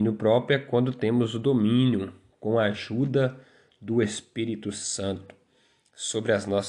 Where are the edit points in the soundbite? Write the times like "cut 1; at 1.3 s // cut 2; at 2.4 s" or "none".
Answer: none

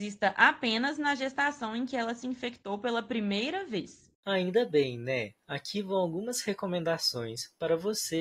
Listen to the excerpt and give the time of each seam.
cut 1; at 4.1 s

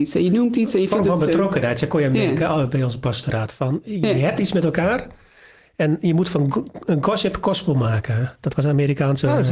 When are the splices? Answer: none

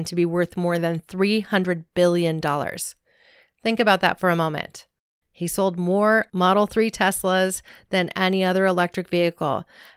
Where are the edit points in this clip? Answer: none

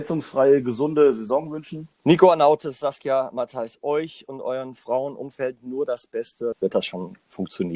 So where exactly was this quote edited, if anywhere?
cut 1; at 1.9 s // cut 2; at 6.5 s

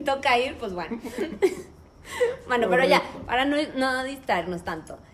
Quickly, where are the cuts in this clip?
none

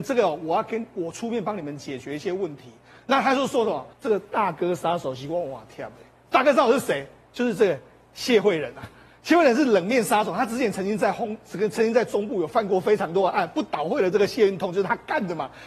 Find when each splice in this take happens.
cut 1; at 3.9 s

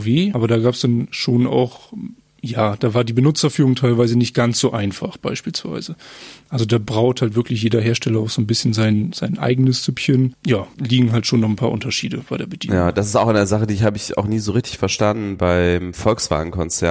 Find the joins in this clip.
none

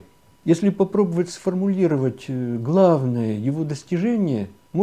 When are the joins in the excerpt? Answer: none

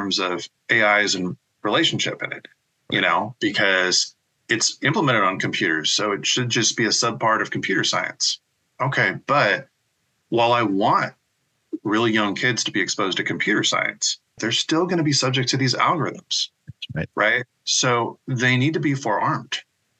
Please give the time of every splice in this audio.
cut 1; at 14.4 s

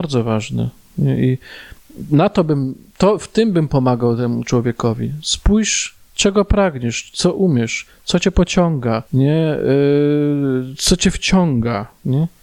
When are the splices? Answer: cut 1; at 9.1 s

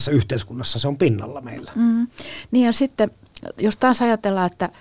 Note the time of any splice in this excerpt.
none

